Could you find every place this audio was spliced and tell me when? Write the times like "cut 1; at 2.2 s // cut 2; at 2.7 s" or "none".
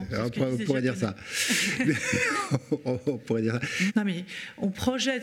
cut 1; at 3.9 s